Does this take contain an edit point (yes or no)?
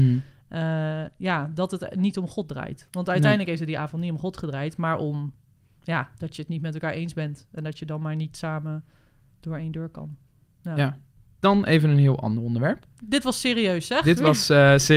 no